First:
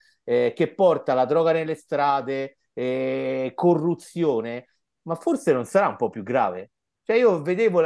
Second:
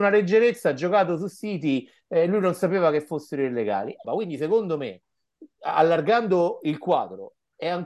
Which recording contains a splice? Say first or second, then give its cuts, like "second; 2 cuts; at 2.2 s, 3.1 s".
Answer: second; 1 cut; at 4.0 s